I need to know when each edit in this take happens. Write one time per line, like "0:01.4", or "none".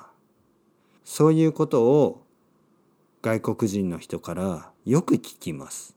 0:01.0